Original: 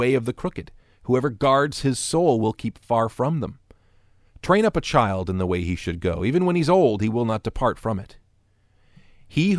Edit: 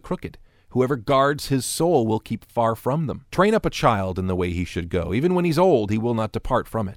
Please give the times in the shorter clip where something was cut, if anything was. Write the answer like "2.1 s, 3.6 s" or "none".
3.3 s